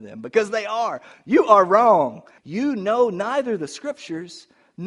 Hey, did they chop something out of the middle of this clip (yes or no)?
yes